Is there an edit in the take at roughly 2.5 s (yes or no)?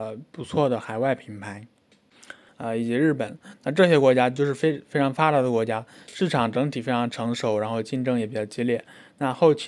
yes